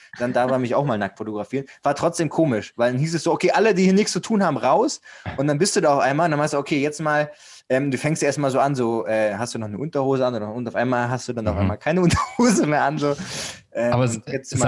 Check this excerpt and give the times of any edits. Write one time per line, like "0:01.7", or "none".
none

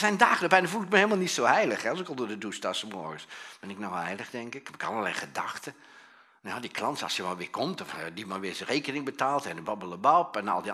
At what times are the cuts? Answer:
none

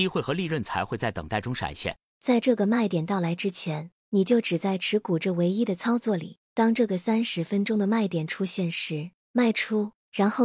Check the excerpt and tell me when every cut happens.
0:02.1

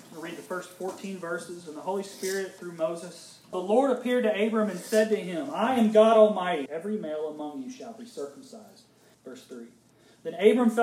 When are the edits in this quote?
0:03.5
0:06.7
0:09.1

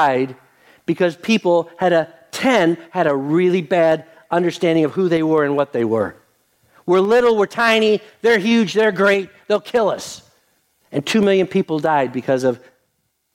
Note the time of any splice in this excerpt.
none

